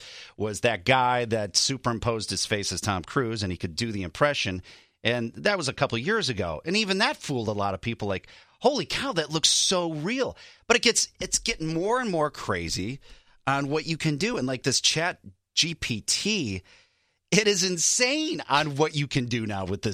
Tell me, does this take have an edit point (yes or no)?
no